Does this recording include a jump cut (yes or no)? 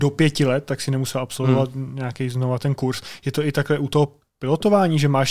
no